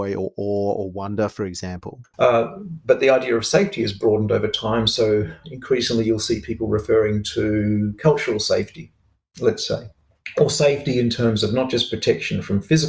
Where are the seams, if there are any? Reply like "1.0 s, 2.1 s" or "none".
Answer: 2.1 s